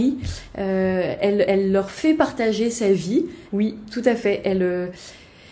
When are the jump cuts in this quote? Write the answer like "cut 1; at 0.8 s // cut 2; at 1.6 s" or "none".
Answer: cut 1; at 1.5 s // cut 2; at 3.5 s